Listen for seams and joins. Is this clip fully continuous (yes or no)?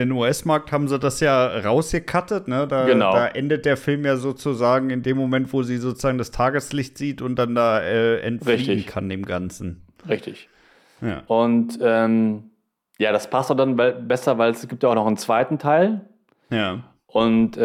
yes